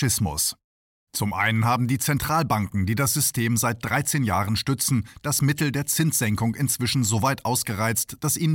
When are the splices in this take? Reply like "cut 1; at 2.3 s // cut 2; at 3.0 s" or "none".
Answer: cut 1; at 1.1 s